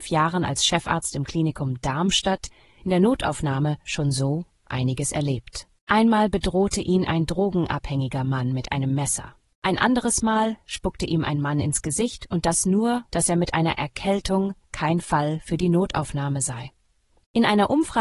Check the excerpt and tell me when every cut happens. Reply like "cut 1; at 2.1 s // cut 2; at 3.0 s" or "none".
cut 1; at 13.1 s // cut 2; at 14.6 s